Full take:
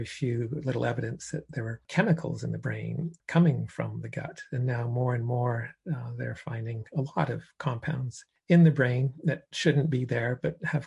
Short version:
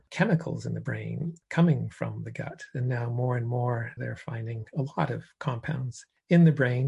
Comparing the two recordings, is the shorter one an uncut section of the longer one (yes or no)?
no